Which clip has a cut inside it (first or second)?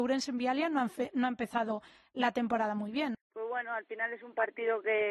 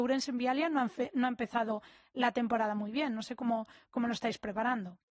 first